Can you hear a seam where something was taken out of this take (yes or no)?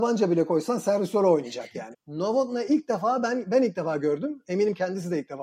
yes